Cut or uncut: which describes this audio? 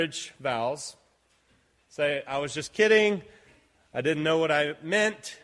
uncut